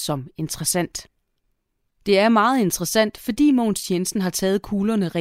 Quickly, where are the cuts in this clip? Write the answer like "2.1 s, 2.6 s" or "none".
1.9 s

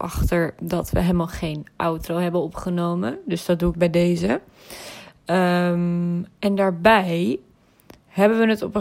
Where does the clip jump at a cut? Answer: 3.7 s

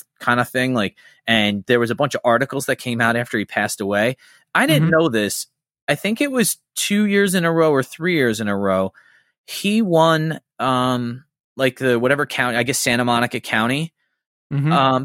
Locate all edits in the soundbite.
none

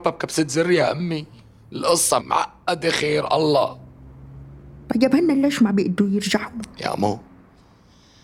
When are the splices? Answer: 2.2 s, 6.7 s

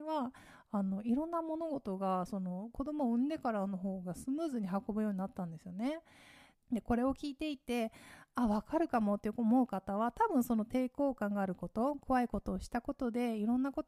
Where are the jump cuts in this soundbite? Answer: 6.5 s

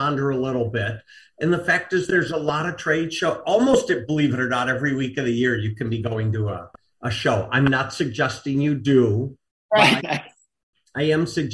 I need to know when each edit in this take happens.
10.0 s

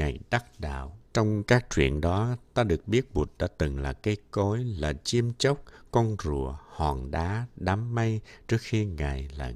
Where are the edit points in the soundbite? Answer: 1.0 s

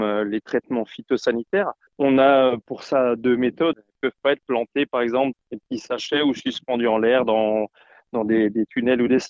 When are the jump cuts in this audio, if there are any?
3.7 s, 5.3 s

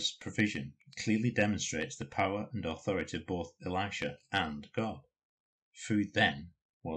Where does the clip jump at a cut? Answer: 5.6 s

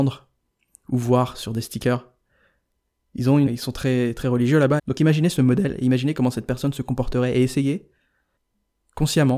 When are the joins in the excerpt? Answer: 3.5 s, 4.8 s

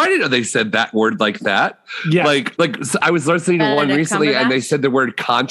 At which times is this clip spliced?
2.5 s

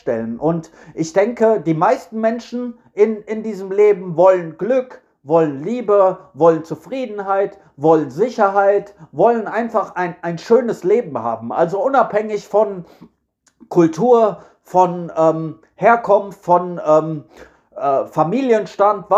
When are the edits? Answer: none

